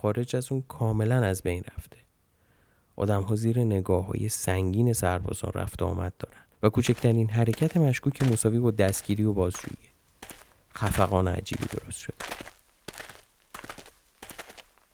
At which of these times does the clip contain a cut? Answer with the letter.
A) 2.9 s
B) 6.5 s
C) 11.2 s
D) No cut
B